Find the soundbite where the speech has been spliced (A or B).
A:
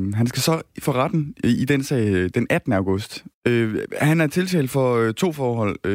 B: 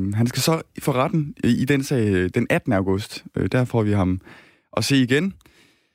A